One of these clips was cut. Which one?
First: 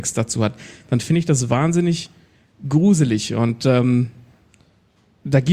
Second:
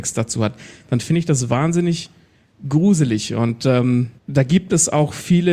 second; 1 cut; at 4.2 s

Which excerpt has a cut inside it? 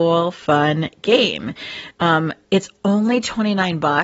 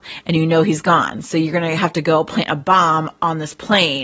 first; 1 cut; at 1.9 s

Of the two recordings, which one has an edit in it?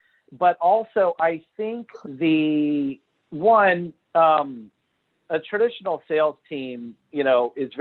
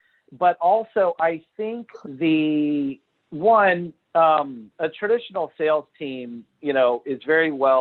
second; 1 cut; at 4.7 s

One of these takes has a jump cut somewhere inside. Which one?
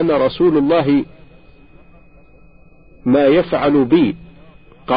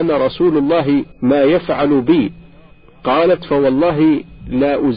second; 1 cut; at 1.1 s

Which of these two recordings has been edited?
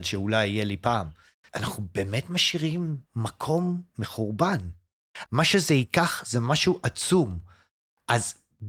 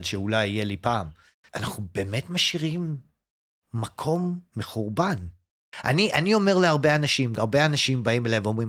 first; 2 cuts; at 3.0 s, 5.2 s

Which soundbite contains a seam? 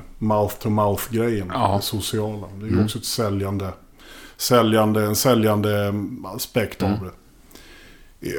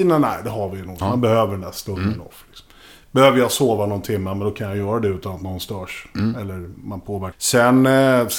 second; 2 cuts; at 1.0 s, 7.3 s

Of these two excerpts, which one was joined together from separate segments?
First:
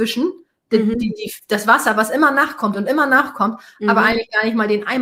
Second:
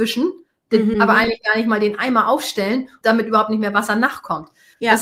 second; 2 cuts; at 0.9 s, 3.0 s

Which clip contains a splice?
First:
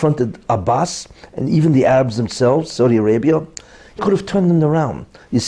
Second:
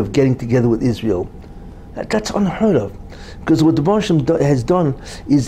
first; 1 cut; at 4.0 s

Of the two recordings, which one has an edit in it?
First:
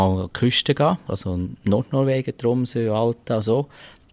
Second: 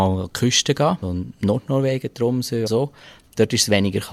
second; 2 cuts; at 1.0 s, 2.7 s

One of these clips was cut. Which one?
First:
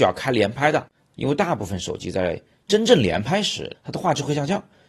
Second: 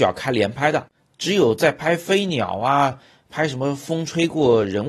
first; 2 cuts; at 1.1 s, 3.7 s

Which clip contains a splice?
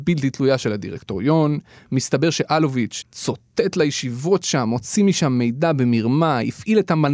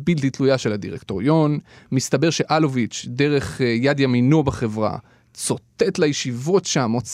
first; 1 cut; at 3.0 s

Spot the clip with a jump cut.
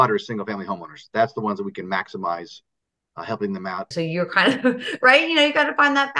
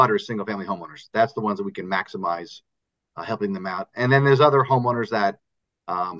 first; 1 cut; at 3.9 s

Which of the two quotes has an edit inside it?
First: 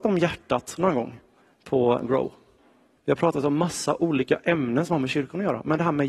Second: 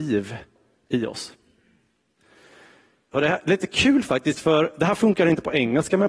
first; 1 cut; at 3.0 s

